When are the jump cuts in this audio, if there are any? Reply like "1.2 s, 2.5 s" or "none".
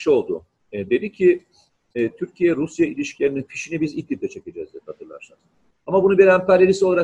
5.7 s